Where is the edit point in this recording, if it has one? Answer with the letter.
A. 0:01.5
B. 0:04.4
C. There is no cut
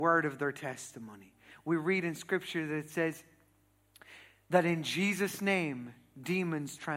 A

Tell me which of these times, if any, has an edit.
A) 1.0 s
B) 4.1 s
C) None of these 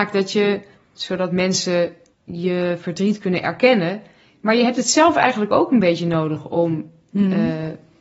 A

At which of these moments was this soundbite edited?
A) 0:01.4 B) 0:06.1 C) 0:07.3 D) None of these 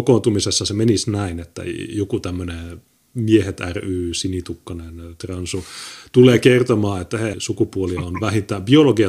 C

